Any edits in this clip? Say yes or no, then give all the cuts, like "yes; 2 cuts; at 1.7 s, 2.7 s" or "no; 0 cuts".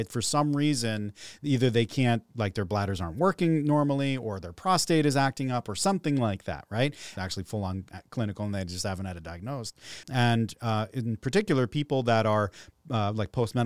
yes; 2 cuts; at 7.2 s, 10.0 s